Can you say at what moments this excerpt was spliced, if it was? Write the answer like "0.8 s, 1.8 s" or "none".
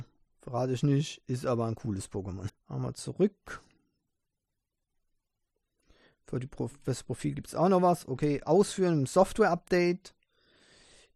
2.5 s, 8.4 s